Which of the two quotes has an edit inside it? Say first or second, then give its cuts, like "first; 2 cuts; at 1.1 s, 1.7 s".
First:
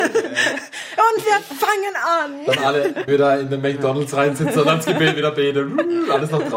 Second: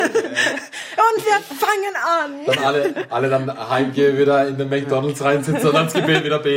first; 1 cut; at 3.1 s